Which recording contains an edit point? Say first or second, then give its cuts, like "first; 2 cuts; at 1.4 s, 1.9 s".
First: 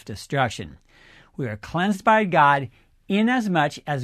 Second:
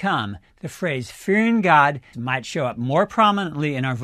second; 1 cut; at 2.1 s